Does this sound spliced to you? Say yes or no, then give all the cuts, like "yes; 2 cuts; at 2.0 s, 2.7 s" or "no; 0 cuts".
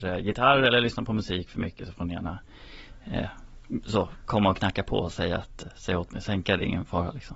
no; 0 cuts